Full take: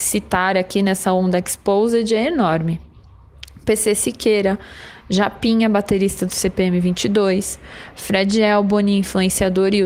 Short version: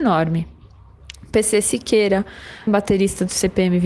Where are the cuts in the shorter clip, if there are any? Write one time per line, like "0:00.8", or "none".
0:02.7